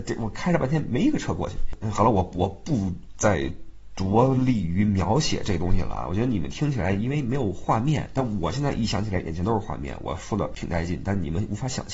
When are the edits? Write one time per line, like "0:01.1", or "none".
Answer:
none